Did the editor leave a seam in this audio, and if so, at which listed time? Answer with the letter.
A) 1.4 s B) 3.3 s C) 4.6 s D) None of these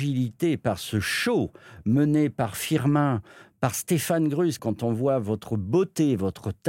C